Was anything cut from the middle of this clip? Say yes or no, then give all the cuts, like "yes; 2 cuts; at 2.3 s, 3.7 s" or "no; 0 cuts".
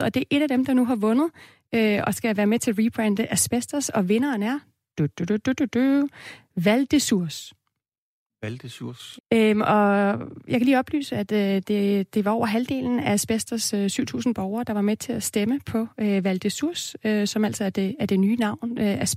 yes; 1 cut; at 9.2 s